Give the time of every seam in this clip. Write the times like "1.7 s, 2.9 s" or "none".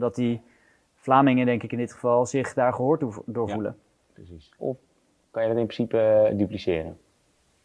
4.6 s